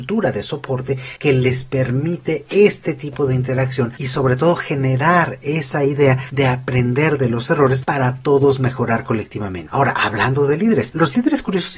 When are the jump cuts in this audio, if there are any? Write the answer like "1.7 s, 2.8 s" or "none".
none